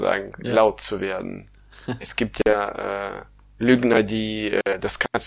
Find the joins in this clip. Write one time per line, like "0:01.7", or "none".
none